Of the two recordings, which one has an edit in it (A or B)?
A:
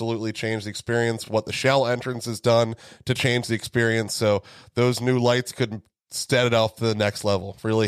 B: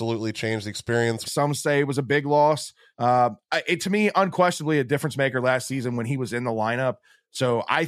B